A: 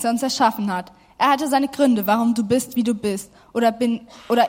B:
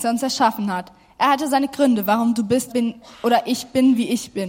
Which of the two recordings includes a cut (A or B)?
B